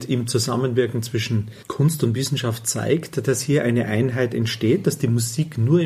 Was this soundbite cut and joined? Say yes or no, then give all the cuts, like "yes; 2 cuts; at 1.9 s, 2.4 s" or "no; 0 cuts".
no; 0 cuts